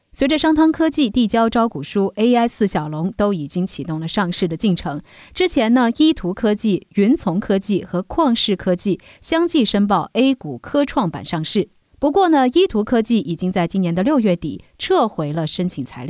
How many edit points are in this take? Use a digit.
0